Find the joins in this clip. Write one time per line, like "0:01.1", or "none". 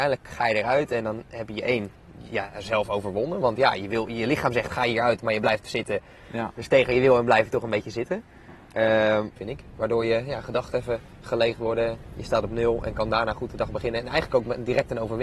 0:09.4